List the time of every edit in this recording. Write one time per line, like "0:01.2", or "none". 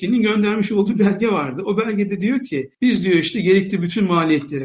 0:02.7